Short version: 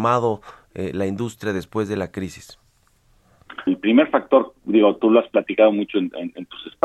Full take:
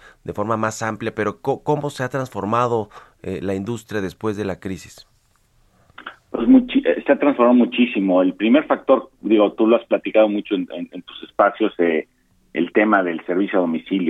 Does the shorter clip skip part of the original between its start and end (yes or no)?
yes